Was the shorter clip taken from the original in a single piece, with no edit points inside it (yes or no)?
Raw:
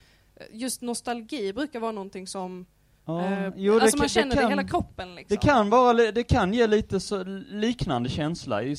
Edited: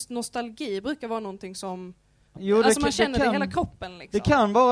no